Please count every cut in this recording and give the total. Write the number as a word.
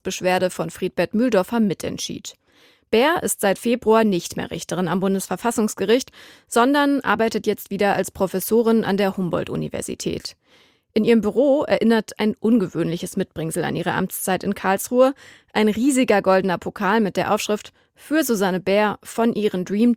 zero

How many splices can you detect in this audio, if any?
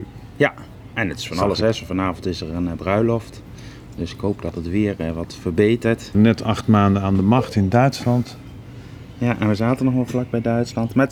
one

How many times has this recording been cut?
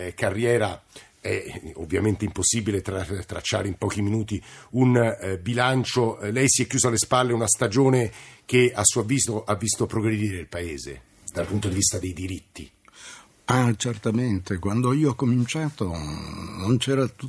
zero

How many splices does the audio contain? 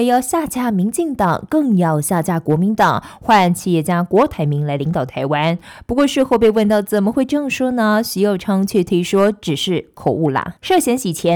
zero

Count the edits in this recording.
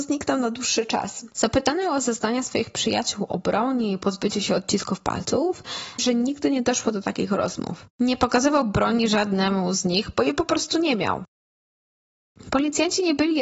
one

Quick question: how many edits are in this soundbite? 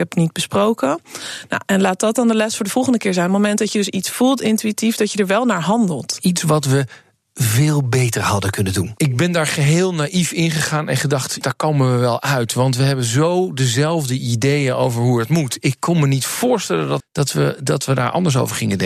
two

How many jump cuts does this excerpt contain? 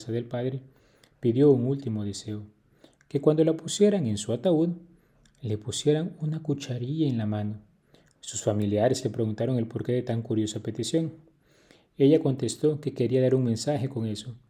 zero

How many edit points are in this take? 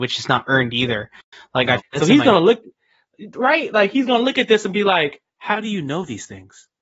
one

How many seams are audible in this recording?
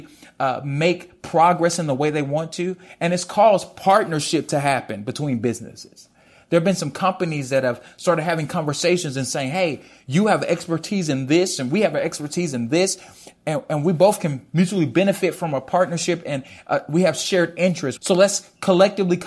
one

